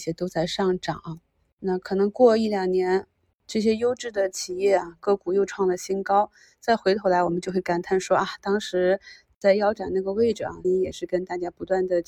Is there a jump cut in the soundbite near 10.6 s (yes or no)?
yes